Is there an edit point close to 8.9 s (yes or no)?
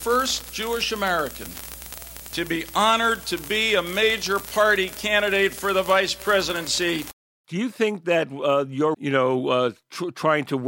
yes